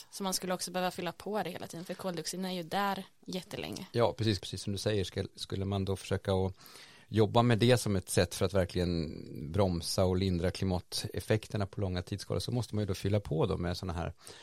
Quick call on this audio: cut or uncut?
cut